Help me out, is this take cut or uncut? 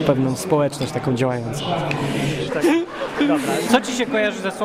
cut